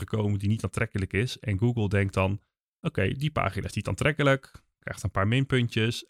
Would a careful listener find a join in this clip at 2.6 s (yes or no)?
no